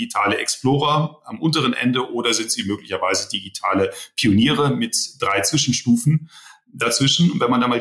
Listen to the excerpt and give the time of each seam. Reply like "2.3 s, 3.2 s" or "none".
none